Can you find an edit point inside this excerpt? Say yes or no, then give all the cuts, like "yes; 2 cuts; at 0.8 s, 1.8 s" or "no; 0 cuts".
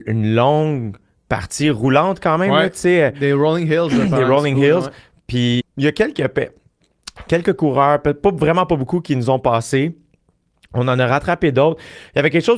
yes; 1 cut; at 5.6 s